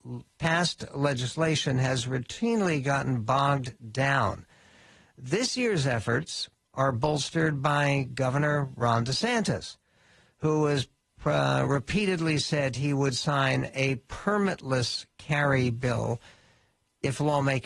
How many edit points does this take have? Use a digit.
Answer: 0